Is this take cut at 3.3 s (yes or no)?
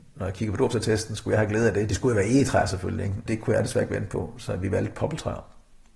yes